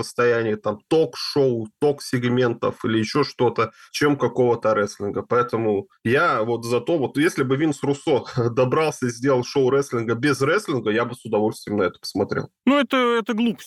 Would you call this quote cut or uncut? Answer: uncut